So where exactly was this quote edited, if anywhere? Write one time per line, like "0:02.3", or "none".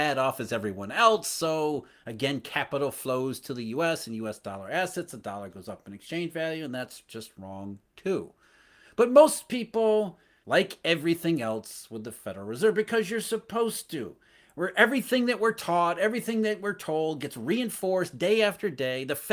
0:10.4